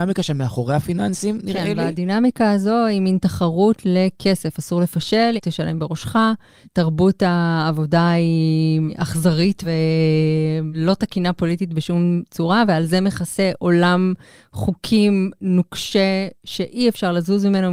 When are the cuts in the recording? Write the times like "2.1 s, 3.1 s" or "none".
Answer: 5.4 s